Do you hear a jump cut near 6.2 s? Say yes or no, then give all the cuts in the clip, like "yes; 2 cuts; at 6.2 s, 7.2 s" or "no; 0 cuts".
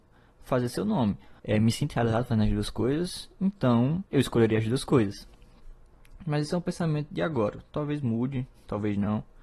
no; 2 cuts; at 1.4 s, 4.1 s